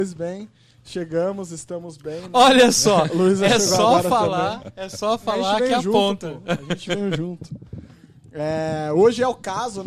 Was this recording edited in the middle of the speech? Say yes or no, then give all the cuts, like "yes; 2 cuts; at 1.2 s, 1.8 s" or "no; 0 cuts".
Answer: no; 0 cuts